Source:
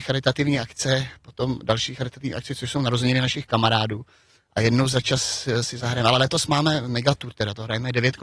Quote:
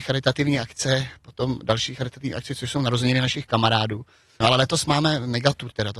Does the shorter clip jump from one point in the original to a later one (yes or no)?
yes